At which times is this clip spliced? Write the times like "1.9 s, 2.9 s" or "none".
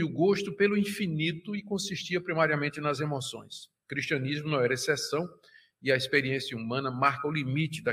none